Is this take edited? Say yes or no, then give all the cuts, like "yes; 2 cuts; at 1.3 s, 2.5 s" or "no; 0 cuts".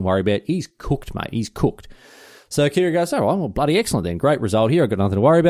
no; 0 cuts